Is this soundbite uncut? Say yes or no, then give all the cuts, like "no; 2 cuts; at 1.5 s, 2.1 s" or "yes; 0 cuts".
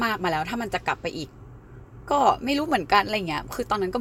yes; 0 cuts